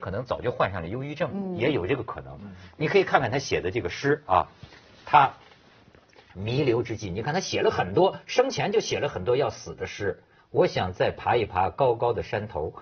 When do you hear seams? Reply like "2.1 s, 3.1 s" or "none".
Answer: 10.4 s